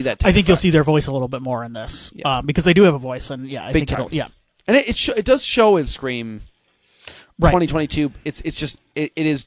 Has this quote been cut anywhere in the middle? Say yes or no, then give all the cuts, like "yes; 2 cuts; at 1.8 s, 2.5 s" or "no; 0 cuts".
no; 0 cuts